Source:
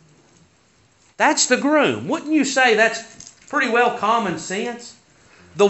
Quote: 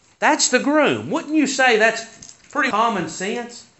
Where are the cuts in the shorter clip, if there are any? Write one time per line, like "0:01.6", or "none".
0:02.7

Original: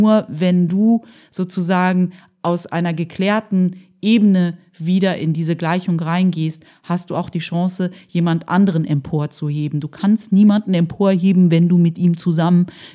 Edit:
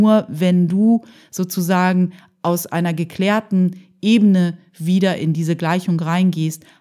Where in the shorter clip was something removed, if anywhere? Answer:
none

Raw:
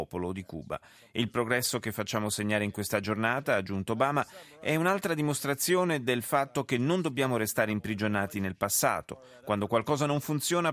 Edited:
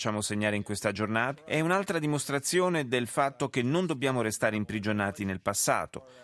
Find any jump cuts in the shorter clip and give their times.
0:01.4

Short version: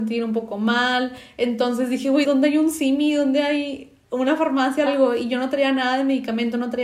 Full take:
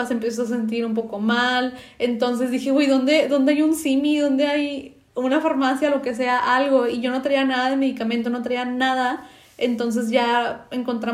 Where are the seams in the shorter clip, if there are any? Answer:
0:02.2
0:04.9

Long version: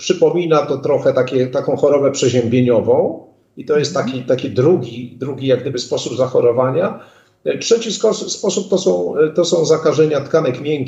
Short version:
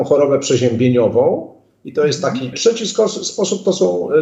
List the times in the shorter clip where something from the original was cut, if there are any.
0:02.5

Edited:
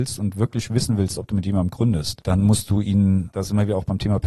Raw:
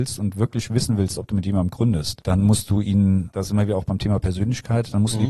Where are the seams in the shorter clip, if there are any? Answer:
none

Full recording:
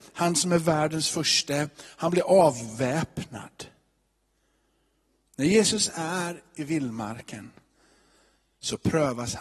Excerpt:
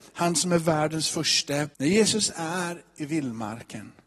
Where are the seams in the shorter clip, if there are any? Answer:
0:01.7

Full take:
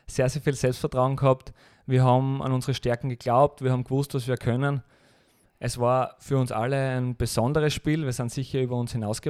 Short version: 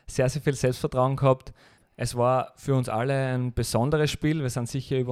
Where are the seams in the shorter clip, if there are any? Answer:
0:01.8

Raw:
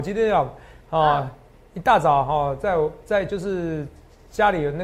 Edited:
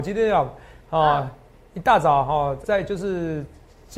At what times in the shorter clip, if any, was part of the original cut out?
0:02.6

